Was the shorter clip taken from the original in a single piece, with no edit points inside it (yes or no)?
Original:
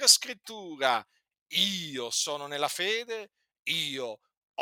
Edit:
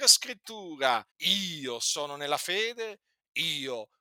no